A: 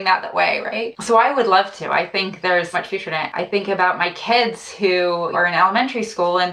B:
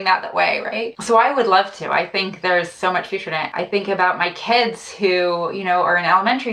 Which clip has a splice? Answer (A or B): A